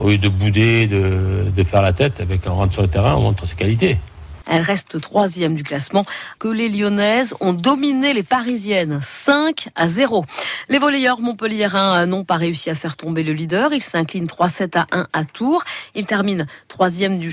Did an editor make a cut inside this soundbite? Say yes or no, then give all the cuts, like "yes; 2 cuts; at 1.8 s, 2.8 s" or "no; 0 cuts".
yes; 2 cuts; at 4.4 s, 6.4 s